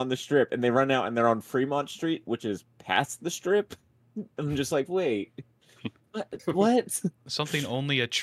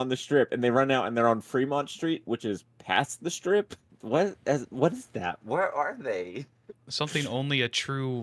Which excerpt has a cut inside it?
second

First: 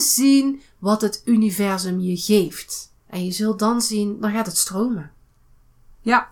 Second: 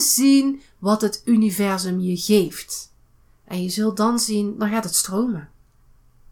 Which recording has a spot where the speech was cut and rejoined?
first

